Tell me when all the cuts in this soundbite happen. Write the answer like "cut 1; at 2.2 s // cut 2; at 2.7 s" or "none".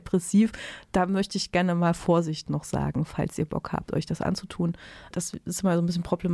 cut 1; at 5.1 s